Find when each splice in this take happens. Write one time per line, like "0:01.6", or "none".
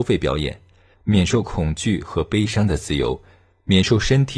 0:00.9